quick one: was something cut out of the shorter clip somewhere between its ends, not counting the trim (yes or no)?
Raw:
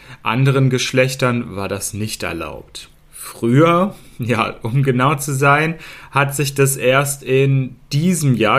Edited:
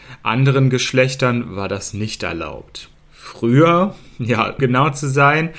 yes